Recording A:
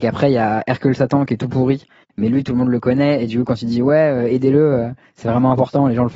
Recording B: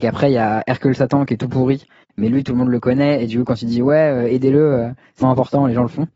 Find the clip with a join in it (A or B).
B